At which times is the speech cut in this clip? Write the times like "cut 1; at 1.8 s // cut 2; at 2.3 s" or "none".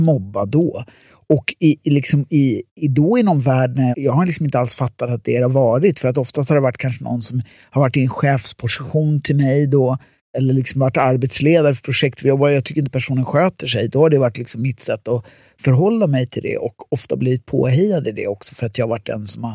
cut 1; at 3.9 s